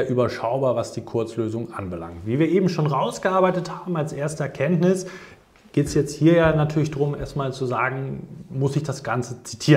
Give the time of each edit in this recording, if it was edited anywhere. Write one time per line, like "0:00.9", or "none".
none